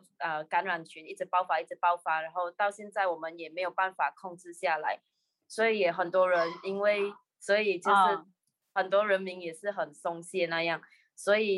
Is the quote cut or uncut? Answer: cut